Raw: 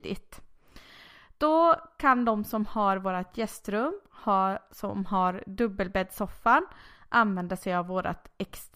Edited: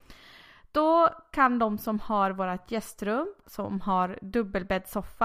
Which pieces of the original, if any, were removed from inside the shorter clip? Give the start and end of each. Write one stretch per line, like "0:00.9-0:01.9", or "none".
0:04.1-0:04.7